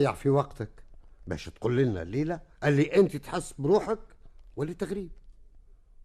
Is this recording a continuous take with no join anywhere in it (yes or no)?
no